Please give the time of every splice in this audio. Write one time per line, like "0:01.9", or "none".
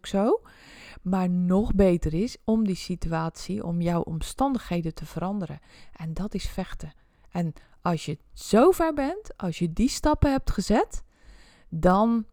none